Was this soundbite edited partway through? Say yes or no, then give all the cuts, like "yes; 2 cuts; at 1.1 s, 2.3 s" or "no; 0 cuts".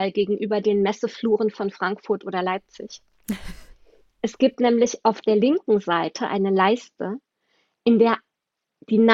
no; 0 cuts